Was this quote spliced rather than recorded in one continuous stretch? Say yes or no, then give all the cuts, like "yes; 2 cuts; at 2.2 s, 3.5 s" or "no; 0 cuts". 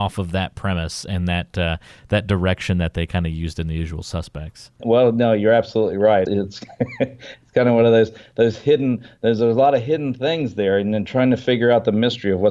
no; 0 cuts